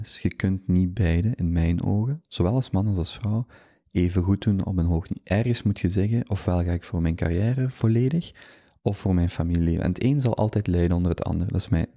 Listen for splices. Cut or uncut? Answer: uncut